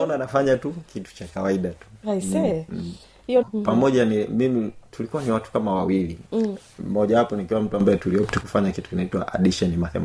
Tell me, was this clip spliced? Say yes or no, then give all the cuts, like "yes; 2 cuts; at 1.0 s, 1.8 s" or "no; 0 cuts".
yes; 1 cut; at 3.4 s